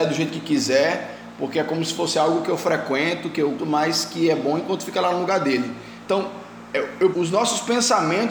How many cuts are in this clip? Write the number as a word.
three